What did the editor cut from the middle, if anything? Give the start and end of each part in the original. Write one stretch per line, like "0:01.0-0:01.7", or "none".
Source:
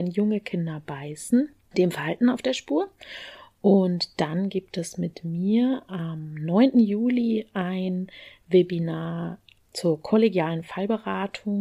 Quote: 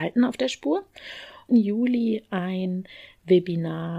0:03.5-0:06.7